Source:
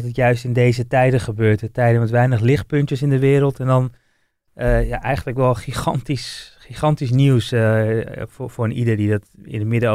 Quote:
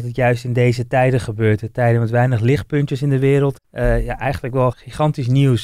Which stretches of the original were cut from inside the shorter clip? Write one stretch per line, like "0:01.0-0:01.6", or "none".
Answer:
0:03.6-0:04.4
0:05.5-0:06.5